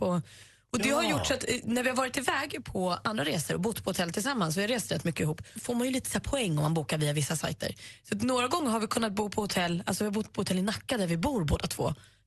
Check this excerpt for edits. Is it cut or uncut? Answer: cut